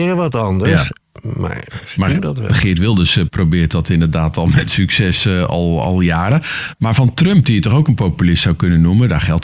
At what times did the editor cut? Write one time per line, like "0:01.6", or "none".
none